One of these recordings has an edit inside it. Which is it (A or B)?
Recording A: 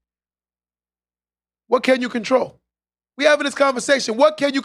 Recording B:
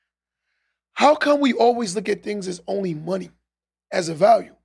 A